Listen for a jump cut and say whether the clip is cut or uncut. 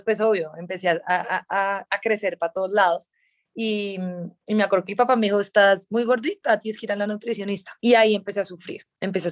cut